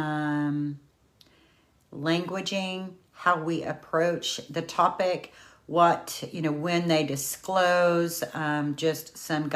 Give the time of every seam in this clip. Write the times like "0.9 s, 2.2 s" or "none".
none